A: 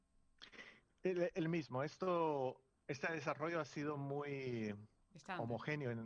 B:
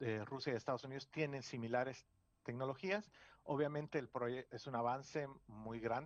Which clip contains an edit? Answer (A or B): B